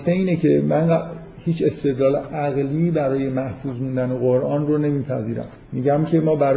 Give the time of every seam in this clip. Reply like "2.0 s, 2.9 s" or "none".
5.6 s